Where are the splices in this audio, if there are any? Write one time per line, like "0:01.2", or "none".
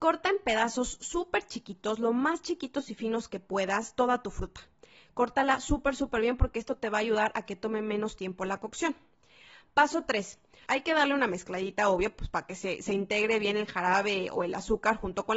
0:10.7